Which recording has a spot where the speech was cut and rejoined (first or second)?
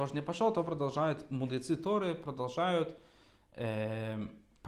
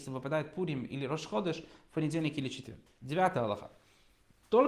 second